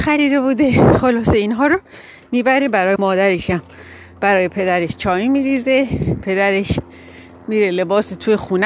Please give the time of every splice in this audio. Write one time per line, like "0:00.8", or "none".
0:03.0